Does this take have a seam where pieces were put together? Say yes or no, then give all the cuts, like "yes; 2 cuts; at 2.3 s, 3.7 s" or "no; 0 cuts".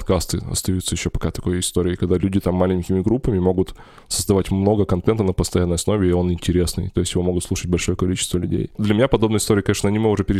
no; 0 cuts